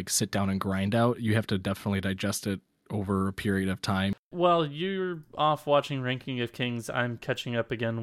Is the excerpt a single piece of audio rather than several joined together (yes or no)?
yes